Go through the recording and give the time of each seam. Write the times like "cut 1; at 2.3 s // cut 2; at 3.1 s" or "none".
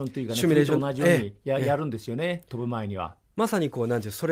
none